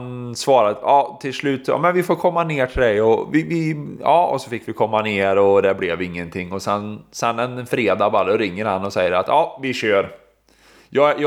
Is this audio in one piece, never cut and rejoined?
yes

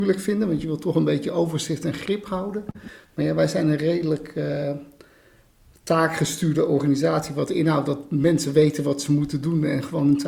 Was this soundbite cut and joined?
no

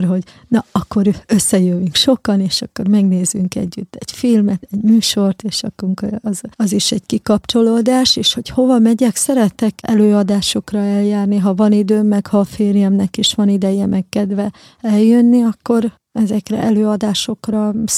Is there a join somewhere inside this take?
yes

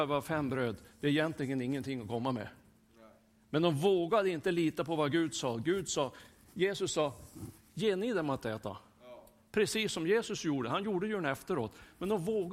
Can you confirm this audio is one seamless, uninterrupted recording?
yes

